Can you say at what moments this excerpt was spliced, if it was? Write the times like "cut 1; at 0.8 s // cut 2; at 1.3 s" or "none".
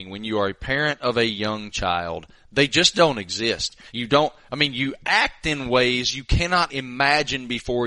cut 1; at 3.9 s // cut 2; at 6.7 s